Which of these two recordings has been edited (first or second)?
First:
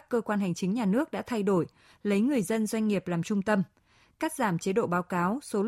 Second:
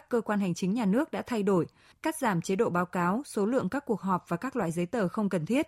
second